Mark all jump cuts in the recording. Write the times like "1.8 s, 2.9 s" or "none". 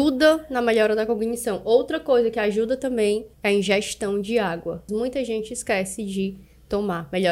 3.3 s, 4.9 s